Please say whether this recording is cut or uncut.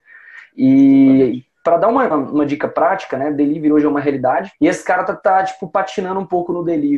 cut